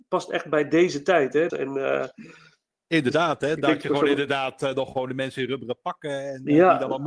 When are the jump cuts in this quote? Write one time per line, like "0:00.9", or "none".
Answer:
0:01.5